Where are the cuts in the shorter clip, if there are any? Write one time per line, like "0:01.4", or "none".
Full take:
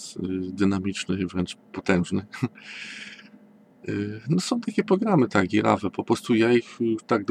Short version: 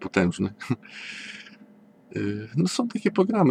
none

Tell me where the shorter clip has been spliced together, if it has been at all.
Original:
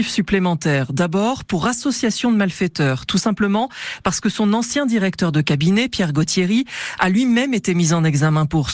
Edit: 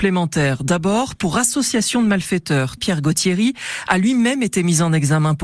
0:02.8

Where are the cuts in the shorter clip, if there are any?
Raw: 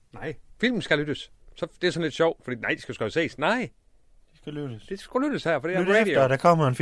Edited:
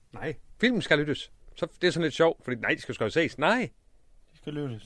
none

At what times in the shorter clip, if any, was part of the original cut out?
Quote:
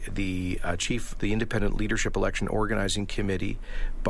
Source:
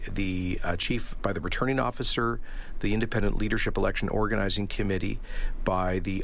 0:01.2

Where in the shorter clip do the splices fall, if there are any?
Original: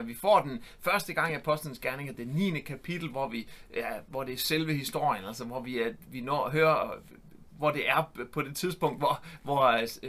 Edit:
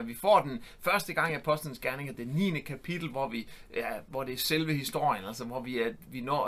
none

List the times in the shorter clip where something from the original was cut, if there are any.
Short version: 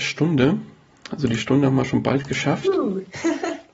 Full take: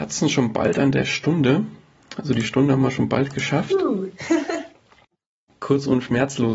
none

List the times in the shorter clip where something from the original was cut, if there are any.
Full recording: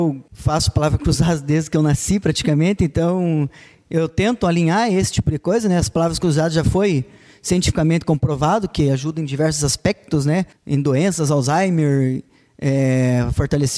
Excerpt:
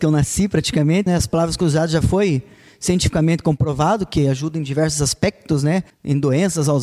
0:01.1

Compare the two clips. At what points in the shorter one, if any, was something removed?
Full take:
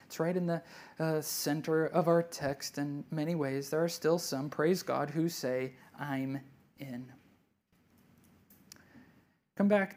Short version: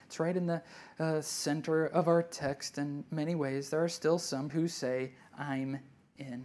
0:04.5

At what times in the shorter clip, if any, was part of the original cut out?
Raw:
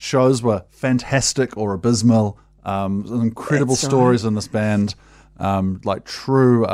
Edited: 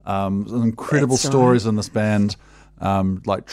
none

